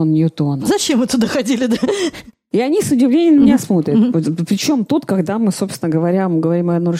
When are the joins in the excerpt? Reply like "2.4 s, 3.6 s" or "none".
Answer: none